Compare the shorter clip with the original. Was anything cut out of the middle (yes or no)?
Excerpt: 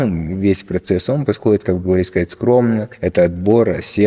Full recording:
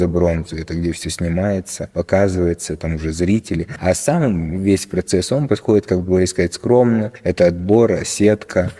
no